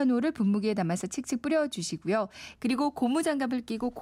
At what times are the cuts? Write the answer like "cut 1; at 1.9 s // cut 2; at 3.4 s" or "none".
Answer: cut 1; at 2.6 s